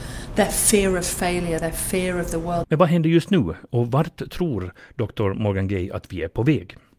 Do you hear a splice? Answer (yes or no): yes